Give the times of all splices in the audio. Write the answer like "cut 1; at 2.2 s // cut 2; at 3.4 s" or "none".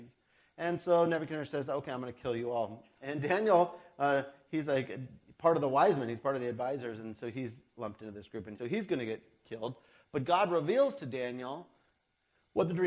cut 1; at 8.6 s